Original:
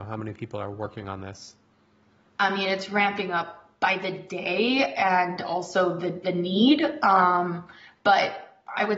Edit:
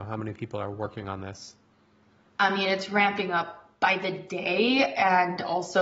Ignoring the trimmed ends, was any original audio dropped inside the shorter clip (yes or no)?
no